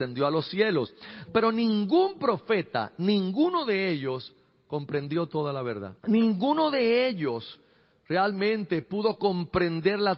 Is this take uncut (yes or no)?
no